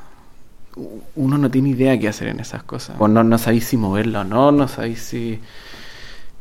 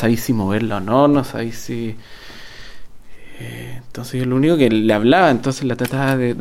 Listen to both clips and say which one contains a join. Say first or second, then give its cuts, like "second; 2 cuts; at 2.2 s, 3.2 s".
first; 1 cut; at 3.0 s